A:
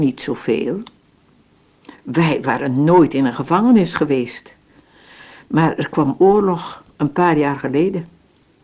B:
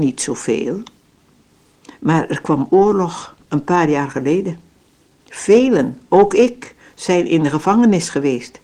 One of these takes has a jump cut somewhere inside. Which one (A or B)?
B